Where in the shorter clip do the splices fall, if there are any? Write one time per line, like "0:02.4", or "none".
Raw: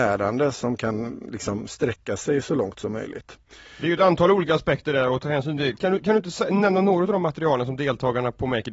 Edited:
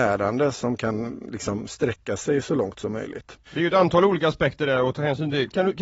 0:03.4

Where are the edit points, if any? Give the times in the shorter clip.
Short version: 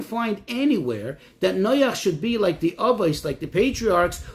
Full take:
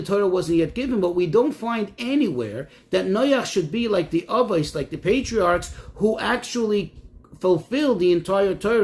none

